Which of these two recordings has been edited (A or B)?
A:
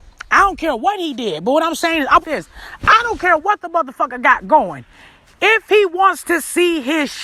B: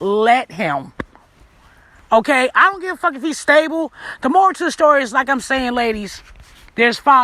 A